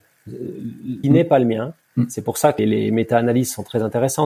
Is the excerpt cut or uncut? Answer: cut